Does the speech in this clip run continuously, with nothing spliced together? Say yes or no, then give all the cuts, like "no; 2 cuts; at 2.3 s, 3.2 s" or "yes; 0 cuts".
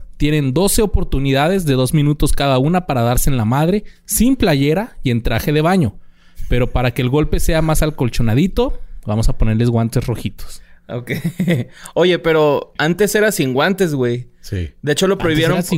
yes; 0 cuts